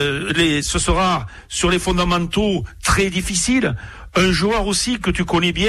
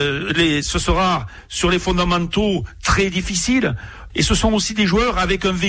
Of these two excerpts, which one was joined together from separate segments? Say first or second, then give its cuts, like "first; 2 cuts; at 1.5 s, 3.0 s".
second; 1 cut; at 4.1 s